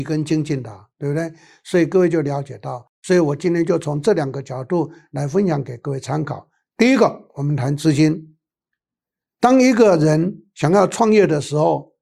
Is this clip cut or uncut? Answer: uncut